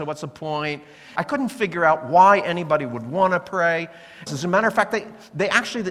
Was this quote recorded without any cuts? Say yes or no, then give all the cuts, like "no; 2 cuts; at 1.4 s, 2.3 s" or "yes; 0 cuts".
no; 2 cuts; at 1.2 s, 4.3 s